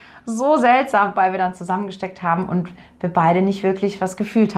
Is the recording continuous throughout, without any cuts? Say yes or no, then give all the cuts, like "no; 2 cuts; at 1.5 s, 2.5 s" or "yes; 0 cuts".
yes; 0 cuts